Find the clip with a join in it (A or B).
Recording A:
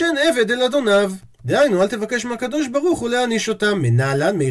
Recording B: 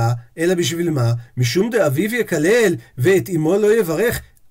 B